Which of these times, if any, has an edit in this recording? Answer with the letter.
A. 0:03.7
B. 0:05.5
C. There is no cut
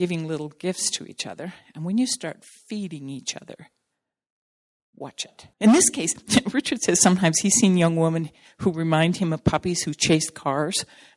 B